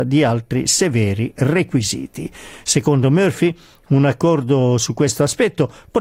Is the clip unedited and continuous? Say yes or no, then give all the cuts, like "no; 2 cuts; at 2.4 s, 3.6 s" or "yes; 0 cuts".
yes; 0 cuts